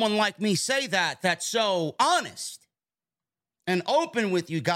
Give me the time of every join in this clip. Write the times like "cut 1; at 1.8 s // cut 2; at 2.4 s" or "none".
none